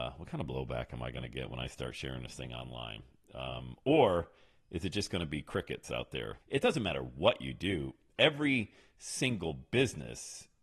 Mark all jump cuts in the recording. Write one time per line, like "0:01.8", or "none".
0:06.4